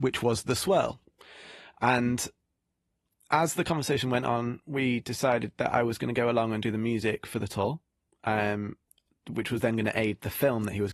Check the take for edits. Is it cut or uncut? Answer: uncut